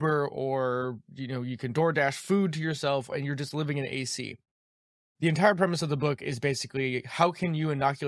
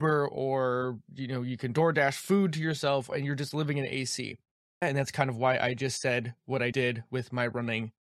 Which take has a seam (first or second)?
second